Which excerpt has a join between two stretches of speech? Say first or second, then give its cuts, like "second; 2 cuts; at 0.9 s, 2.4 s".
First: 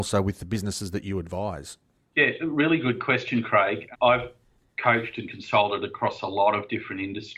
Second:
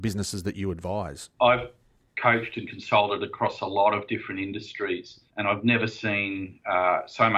second; 2 cuts; at 1.4 s, 5.3 s